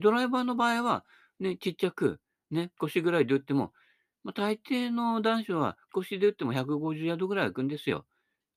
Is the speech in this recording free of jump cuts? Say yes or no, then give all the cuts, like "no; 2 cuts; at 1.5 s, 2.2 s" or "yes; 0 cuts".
no; 2 cuts; at 2.8 s, 5.9 s